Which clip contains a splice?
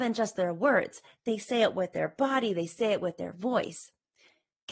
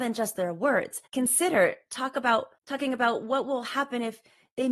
second; 2 cuts; at 1.1 s, 2.6 s

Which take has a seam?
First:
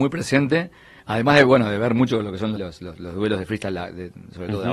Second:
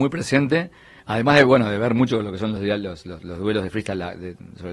first; 1 cut; at 2.6 s

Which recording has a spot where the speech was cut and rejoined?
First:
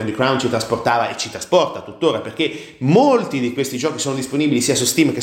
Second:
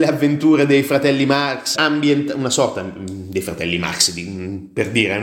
second; 1 cut; at 1.7 s

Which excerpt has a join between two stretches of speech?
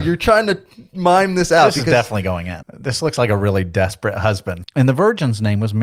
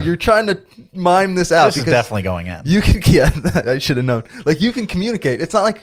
first; 2 cuts; at 2.6 s, 4.6 s

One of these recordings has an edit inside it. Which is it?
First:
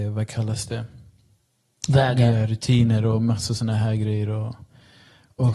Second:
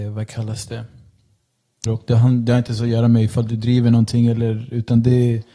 second; 1 cut; at 1.9 s

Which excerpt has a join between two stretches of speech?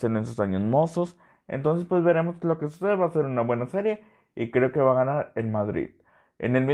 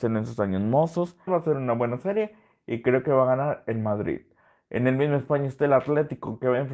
second; 1 cut; at 1.3 s

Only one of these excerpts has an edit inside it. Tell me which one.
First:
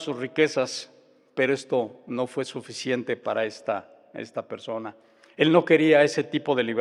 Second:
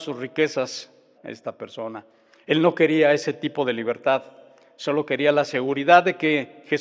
second; 1 cut; at 1.2 s

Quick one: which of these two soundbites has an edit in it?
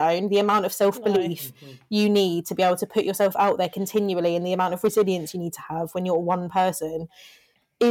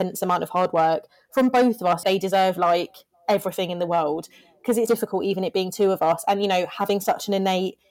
second; 2 cuts; at 2.0 s, 4.9 s

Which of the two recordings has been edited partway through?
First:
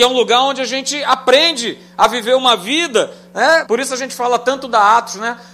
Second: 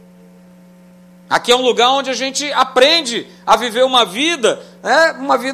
first; 1 cut; at 3.6 s

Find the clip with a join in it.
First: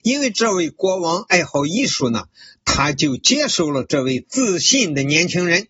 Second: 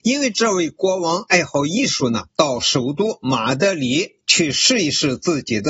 second; 1 cut; at 2.3 s

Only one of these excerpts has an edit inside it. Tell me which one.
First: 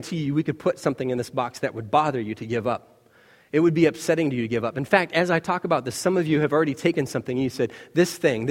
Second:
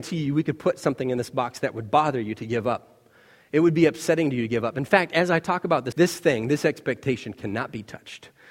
second; 1 cut; at 5.9 s

